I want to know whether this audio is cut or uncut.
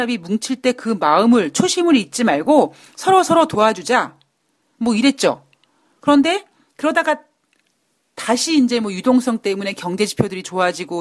uncut